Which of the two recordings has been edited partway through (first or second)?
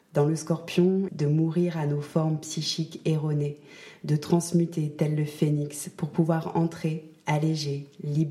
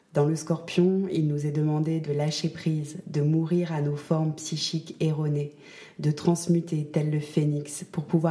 first